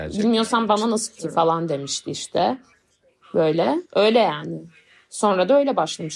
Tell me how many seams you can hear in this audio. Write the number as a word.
two